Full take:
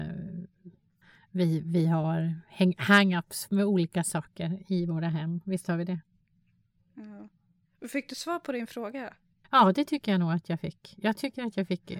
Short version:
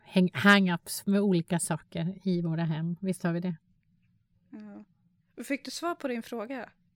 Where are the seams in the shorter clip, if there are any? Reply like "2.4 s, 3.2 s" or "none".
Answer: none